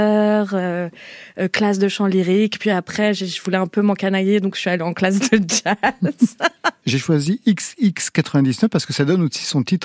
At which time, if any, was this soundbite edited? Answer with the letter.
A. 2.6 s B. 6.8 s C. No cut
B